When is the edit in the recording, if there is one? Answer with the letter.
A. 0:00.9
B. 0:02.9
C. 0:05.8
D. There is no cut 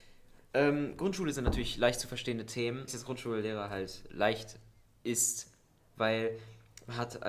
B